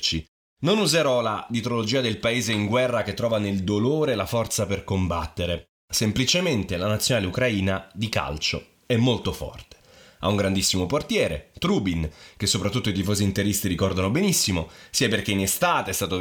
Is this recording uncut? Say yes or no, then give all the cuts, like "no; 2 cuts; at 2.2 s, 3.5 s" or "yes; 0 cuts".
yes; 0 cuts